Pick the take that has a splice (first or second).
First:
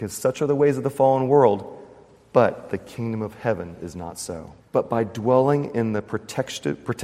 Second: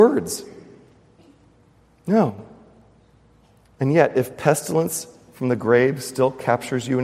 first